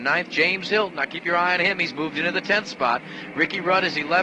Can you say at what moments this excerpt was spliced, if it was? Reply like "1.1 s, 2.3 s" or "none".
none

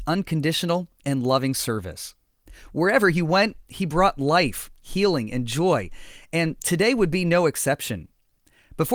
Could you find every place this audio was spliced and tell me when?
none

